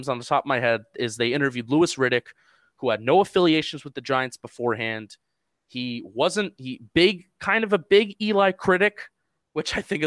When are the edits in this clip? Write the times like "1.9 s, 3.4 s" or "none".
none